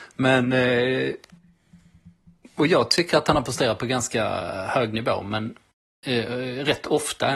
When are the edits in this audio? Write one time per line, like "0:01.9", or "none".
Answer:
none